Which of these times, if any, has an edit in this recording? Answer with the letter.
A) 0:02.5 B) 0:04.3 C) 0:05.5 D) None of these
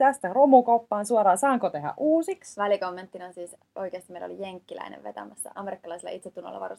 C